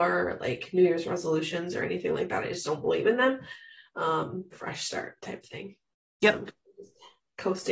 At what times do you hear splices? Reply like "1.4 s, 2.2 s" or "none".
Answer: 4.5 s